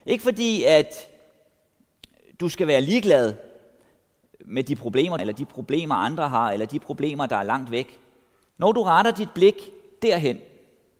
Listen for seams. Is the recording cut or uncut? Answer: cut